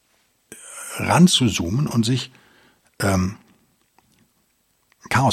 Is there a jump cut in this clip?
no; 0 cuts

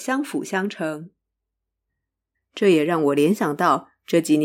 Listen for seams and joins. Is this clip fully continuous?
no; 1 cut; at 2.3 s

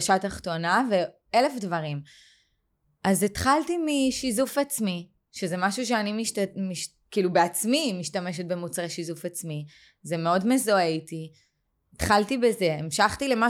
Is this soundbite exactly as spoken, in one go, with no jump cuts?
yes; 0 cuts

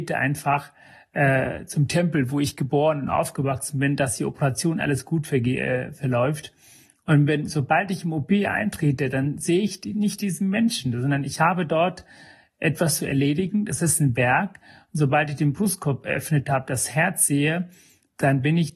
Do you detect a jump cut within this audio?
no; 0 cuts

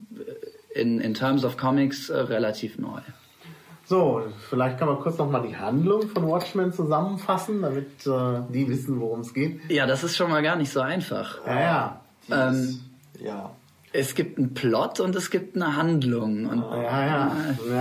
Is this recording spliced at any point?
yes; 1 cut; at 8.7 s

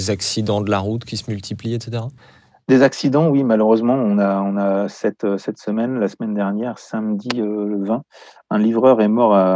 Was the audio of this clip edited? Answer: no; 0 cuts

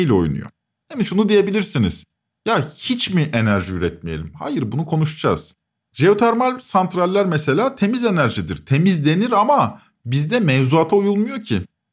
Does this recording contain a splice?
no; 0 cuts

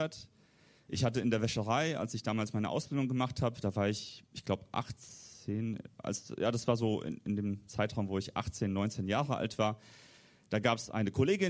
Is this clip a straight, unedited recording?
yes; 0 cuts

